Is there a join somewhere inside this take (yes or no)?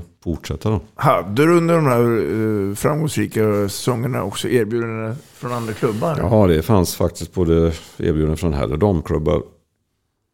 no